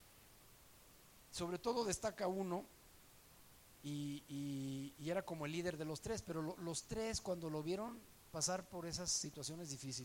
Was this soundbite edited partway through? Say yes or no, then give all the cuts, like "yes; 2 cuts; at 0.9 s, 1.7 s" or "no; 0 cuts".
no; 0 cuts